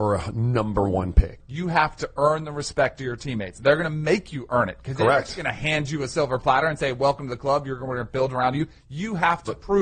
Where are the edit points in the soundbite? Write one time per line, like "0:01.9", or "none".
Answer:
0:01.4